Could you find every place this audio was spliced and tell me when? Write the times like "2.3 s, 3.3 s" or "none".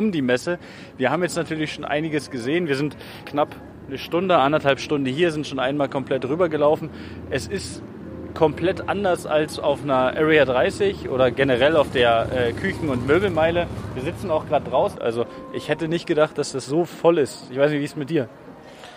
3.2 s, 15.0 s